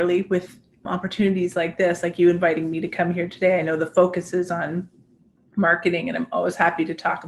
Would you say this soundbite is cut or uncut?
uncut